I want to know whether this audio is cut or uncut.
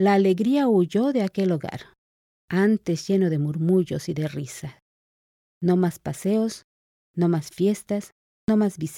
uncut